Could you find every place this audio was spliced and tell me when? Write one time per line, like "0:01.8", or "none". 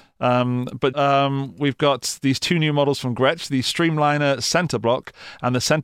0:00.9